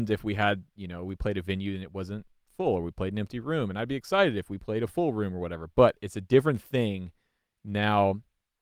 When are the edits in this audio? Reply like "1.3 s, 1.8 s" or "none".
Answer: none